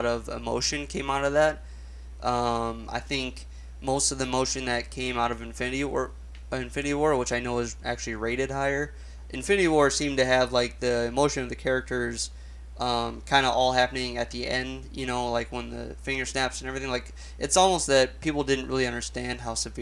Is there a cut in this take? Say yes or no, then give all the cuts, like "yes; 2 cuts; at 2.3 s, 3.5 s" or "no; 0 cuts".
no; 0 cuts